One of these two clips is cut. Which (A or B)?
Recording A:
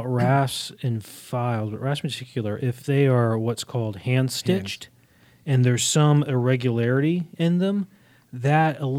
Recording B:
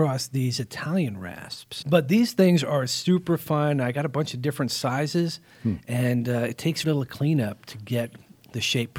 B